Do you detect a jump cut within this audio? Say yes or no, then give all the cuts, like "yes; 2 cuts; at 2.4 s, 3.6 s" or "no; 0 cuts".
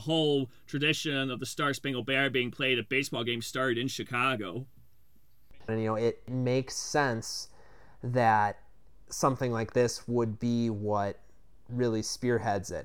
yes; 1 cut; at 5.7 s